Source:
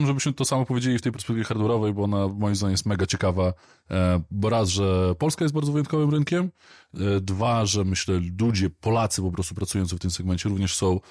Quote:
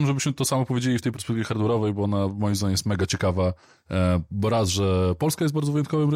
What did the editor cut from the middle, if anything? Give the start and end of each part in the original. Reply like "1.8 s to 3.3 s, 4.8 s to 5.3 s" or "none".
none